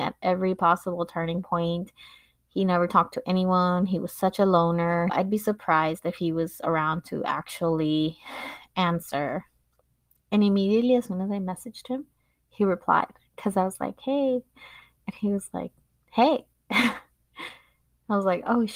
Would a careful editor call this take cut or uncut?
cut